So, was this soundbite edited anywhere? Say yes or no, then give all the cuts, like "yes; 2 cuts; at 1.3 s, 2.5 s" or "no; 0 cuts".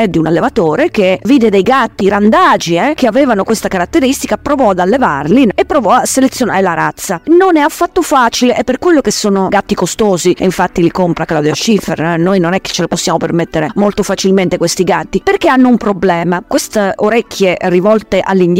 no; 0 cuts